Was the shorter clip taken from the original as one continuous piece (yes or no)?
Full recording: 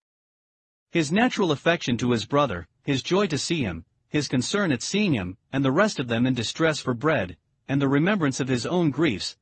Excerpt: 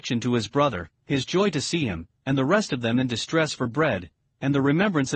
no